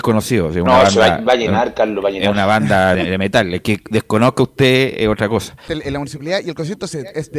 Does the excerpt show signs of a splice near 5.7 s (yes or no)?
yes